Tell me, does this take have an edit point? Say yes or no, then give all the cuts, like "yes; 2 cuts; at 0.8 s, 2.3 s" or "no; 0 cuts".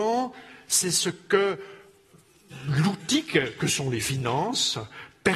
no; 0 cuts